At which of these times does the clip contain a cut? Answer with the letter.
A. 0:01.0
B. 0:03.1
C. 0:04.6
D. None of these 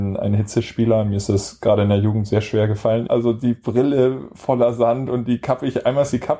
B